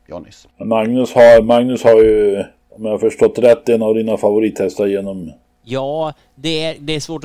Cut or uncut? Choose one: uncut